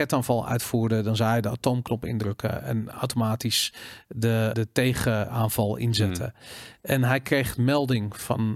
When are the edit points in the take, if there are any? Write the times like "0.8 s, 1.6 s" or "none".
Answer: 4.5 s